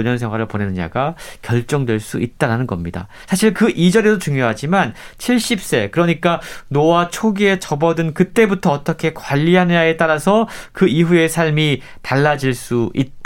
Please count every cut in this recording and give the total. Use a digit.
0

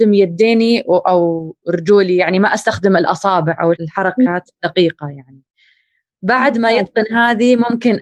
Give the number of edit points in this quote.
1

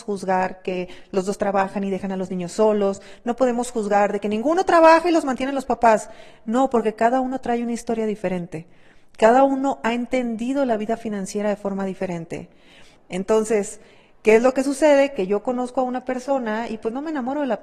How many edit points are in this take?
1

